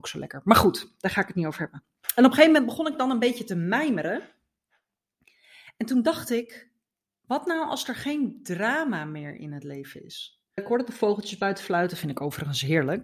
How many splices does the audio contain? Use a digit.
1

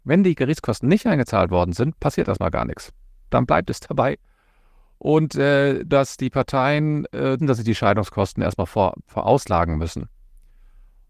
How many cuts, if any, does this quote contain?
2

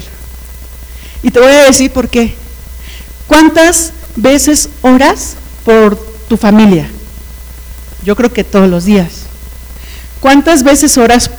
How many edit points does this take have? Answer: 0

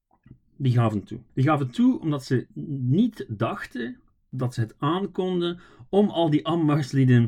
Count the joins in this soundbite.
1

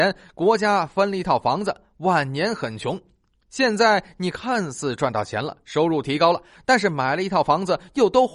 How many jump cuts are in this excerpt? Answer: 0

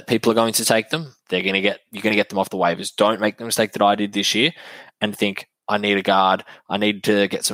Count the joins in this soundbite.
2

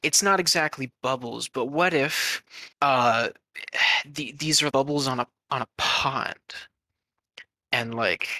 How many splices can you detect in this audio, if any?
2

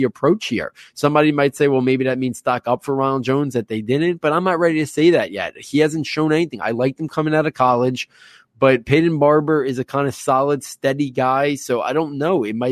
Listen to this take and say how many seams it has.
0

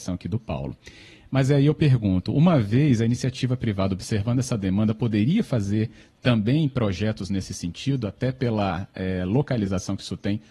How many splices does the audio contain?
0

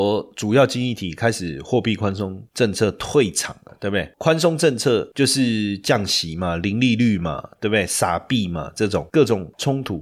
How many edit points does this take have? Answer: 1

